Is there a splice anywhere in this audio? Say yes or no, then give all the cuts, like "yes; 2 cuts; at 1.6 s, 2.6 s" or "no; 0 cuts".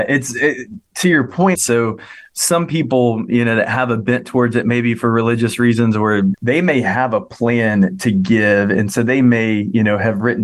yes; 2 cuts; at 1.6 s, 6.3 s